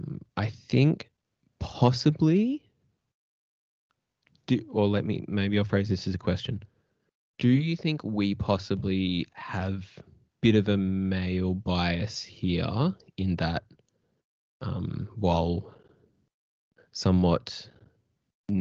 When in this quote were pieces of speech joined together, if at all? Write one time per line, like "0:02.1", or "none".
none